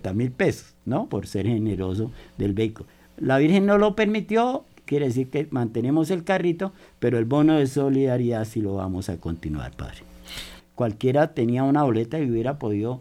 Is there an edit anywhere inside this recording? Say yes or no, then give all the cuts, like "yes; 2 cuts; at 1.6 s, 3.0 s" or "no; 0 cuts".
yes; 3 cuts; at 1.1 s, 4.9 s, 10.6 s